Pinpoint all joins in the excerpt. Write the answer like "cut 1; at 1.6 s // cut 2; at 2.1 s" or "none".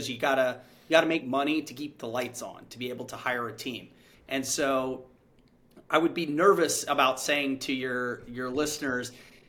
cut 1; at 4.1 s